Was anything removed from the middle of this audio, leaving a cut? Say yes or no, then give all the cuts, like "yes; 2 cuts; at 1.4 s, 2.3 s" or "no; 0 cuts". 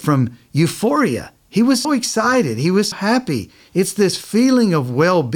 yes; 2 cuts; at 1.8 s, 2.9 s